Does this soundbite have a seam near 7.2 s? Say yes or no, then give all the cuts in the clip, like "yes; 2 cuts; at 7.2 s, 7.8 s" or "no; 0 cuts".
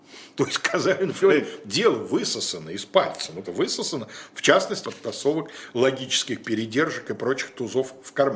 no; 3 cuts; at 1.2 s, 3.4 s, 4.8 s